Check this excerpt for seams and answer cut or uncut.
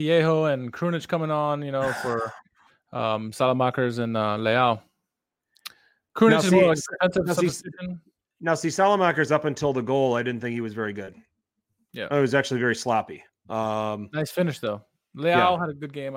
uncut